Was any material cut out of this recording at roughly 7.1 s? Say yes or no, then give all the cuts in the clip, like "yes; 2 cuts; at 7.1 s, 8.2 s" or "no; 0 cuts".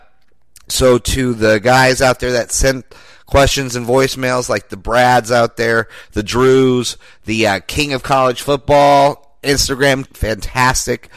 no; 1 cut; at 10.1 s